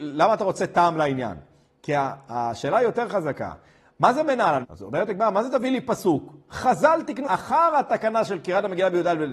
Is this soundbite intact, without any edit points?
no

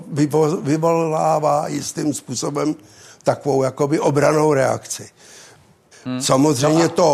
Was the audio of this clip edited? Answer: yes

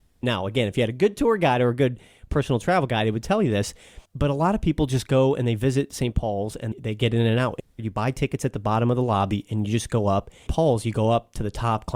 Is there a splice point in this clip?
yes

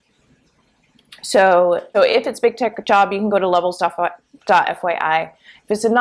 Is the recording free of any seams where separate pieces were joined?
no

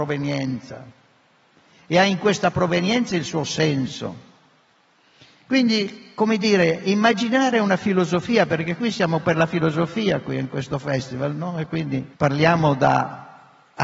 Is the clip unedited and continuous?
no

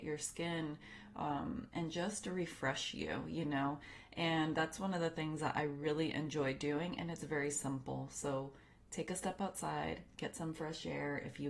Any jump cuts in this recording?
no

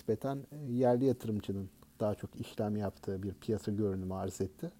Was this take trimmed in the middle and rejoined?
no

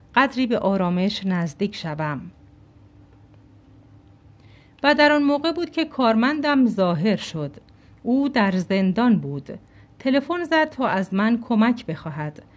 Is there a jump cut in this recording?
no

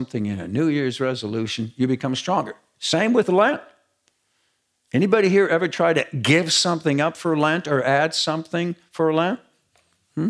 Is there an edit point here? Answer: no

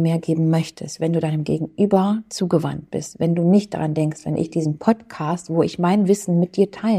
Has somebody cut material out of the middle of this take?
no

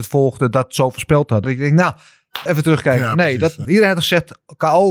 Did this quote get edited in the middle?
yes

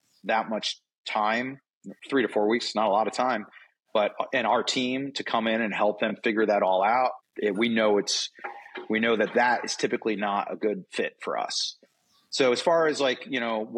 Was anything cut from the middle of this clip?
yes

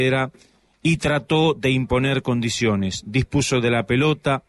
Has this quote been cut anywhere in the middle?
no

